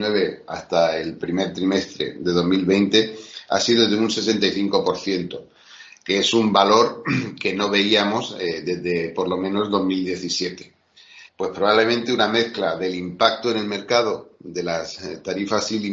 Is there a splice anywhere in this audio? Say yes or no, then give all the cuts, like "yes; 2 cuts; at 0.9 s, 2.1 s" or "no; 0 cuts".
yes; 1 cut; at 11.3 s